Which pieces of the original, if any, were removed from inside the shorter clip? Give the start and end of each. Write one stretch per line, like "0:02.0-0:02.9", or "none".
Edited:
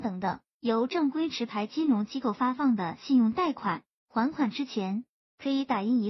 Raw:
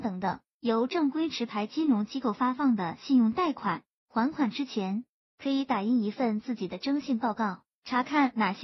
none